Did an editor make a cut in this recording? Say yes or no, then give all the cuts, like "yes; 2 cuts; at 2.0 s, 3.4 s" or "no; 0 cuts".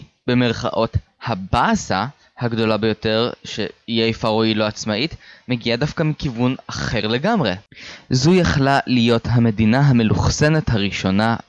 no; 0 cuts